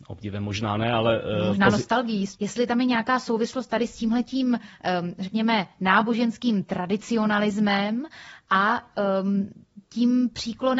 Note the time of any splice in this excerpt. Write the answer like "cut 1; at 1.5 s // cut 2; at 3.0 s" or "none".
cut 1; at 2.4 s